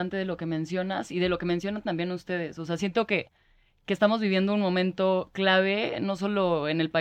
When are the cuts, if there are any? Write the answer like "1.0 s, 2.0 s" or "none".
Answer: none